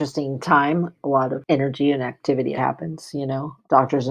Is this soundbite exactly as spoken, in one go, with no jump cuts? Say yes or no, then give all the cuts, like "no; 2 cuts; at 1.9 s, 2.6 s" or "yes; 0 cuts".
no; 1 cut; at 2.5 s